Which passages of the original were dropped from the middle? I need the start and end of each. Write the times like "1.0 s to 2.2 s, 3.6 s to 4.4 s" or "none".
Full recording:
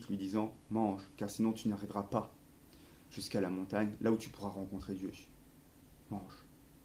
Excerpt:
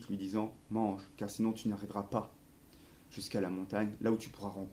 none